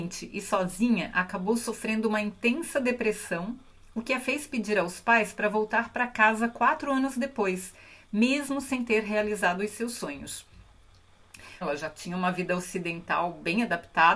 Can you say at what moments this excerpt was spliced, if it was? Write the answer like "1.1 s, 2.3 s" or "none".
11.6 s